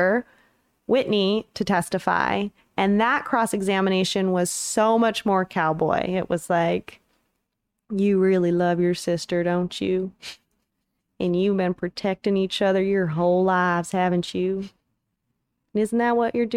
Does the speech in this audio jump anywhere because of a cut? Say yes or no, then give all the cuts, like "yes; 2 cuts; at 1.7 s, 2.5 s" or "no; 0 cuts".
no; 0 cuts